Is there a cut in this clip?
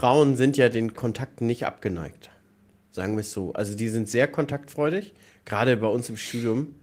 yes; 1 cut; at 0.9 s

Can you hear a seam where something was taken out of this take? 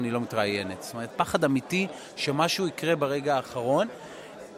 yes; 1 cut; at 1.1 s

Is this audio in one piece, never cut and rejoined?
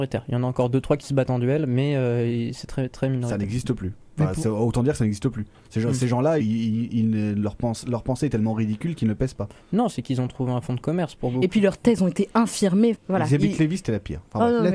no; 3 cuts; at 6.4 s, 9.9 s, 12.9 s

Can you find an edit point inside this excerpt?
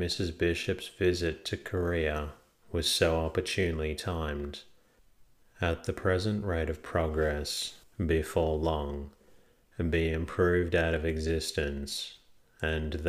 yes; 1 cut; at 7.8 s

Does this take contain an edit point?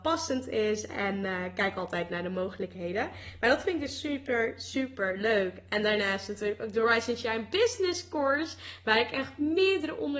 no; 0 cuts

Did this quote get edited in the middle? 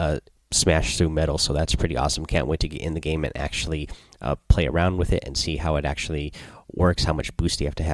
no; 0 cuts

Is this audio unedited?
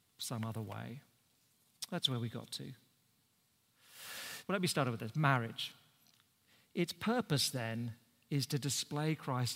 no; 1 cut; at 4.4 s

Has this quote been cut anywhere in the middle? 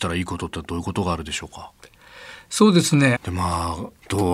yes; 1 cut; at 3.2 s

